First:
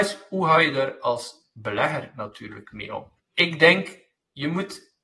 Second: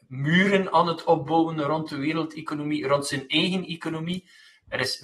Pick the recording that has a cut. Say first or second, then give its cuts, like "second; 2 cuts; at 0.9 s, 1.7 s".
first; 1 cut; at 3.2 s